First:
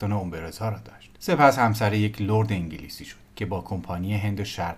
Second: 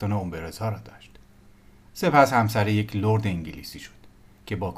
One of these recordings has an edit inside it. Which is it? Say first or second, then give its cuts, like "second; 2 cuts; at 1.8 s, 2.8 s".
first; 2 cuts; at 1.1 s, 3.2 s